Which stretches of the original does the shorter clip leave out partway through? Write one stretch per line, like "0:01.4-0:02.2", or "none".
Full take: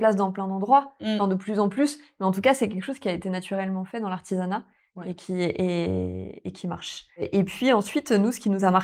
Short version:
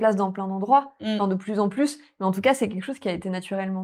none

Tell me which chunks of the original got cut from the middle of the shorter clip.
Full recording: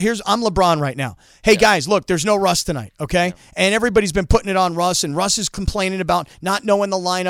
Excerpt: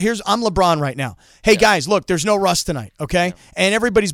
none

